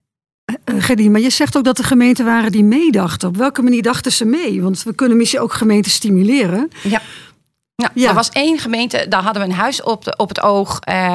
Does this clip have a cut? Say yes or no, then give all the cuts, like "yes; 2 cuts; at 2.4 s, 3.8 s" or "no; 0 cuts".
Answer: no; 0 cuts